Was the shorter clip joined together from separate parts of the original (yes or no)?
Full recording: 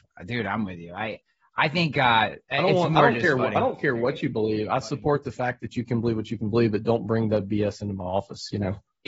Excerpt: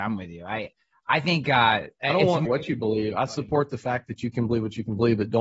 yes